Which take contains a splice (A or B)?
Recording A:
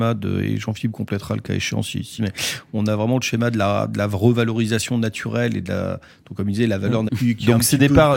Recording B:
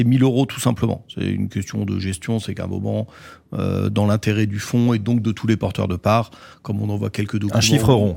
A